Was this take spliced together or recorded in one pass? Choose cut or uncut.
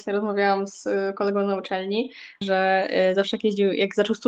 cut